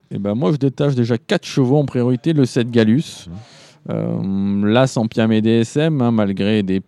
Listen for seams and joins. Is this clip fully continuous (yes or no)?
yes